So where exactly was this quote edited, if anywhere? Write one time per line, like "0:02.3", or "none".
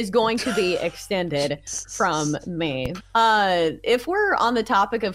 0:03.0